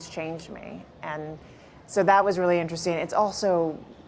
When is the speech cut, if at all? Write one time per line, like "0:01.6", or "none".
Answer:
none